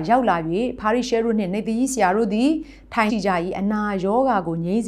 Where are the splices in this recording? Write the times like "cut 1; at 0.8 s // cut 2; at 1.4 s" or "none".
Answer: cut 1; at 3.1 s